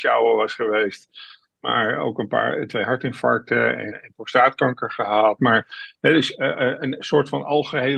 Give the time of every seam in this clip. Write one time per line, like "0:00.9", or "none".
0:03.9
0:05.4